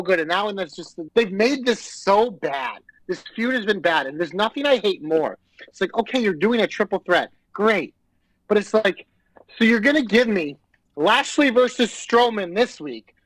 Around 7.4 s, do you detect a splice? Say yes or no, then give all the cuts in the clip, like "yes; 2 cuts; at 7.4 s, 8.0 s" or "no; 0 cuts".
no; 1 cut; at 1.1 s